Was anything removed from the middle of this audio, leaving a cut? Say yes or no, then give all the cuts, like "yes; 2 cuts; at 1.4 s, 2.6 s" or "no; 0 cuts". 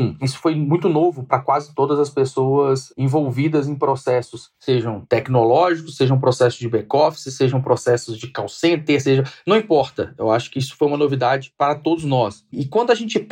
no; 0 cuts